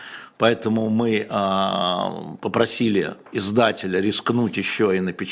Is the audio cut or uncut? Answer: uncut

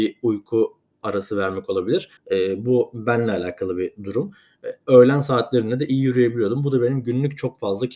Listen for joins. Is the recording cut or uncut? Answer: cut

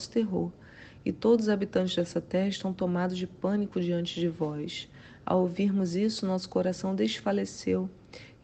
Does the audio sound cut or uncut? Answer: uncut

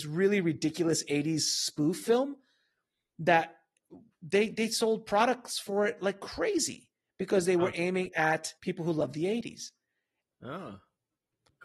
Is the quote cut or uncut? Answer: cut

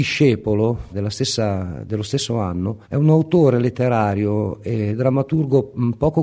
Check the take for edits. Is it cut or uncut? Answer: cut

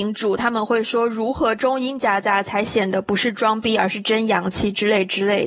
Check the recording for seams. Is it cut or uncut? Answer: uncut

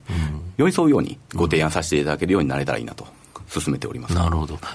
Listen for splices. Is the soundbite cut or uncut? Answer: uncut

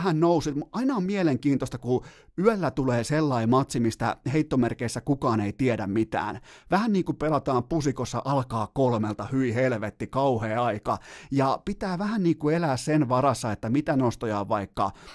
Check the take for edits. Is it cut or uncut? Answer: uncut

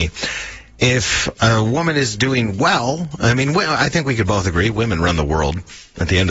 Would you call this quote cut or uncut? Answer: uncut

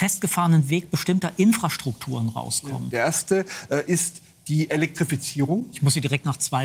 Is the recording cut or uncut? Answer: cut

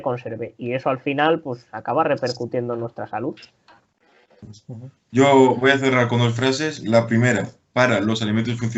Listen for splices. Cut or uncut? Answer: uncut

